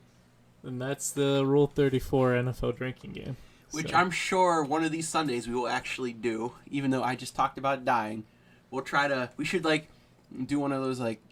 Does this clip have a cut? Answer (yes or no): yes